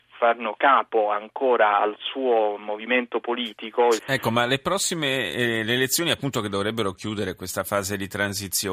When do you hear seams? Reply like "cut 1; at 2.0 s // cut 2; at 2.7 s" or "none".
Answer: cut 1; at 4.0 s